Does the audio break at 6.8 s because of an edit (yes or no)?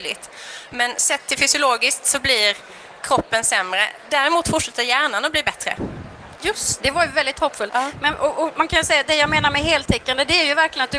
yes